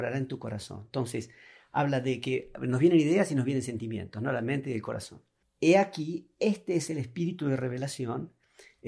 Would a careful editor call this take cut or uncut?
uncut